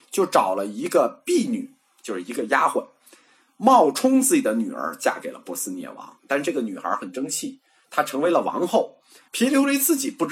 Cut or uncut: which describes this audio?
cut